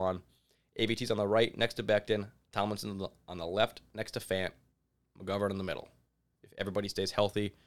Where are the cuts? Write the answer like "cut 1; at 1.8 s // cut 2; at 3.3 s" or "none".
cut 1; at 6.3 s